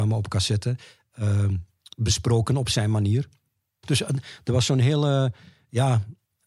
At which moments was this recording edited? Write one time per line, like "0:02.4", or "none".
0:03.8